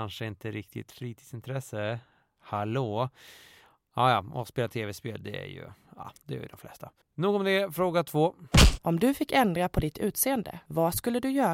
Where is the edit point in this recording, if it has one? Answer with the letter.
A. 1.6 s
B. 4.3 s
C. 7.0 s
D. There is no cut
C